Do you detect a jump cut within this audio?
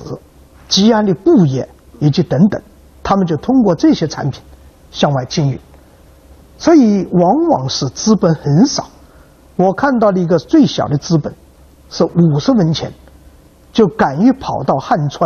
no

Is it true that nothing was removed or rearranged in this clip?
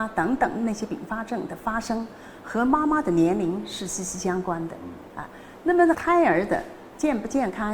yes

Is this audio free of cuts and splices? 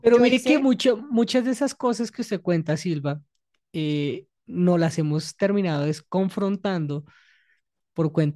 yes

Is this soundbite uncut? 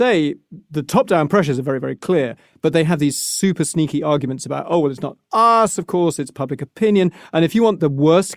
yes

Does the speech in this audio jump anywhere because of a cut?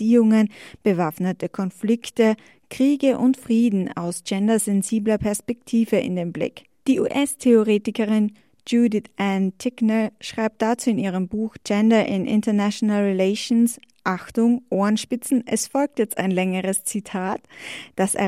yes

